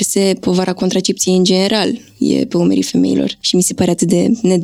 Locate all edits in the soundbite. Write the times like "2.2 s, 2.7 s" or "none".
none